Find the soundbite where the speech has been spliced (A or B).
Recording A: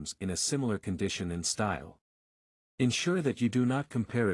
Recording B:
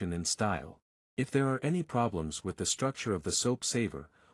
B